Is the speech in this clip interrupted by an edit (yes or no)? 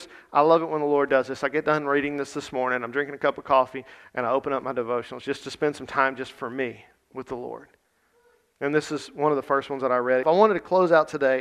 yes